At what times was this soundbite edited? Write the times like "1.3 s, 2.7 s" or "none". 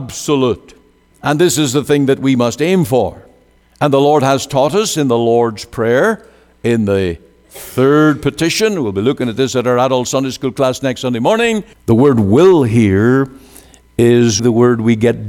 11.7 s, 14.4 s